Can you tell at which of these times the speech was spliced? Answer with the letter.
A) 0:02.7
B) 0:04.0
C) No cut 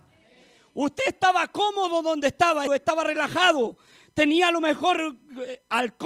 A